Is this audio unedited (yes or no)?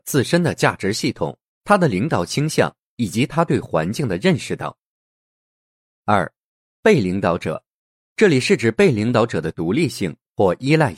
no